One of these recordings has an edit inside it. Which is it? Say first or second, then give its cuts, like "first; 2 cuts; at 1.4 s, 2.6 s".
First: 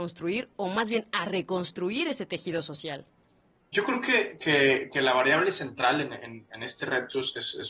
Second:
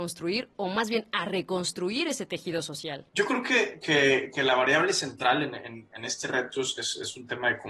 second; 1 cut; at 3.1 s